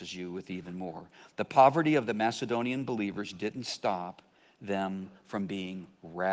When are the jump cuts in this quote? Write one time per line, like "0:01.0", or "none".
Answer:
none